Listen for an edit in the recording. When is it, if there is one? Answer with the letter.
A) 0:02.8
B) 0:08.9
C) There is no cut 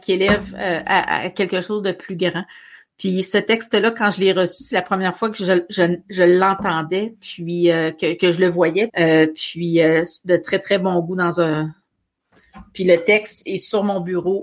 B